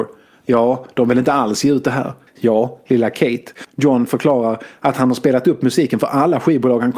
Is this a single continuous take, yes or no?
no